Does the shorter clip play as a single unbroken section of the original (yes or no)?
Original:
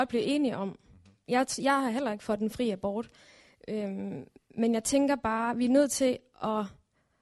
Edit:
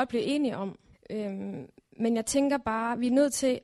no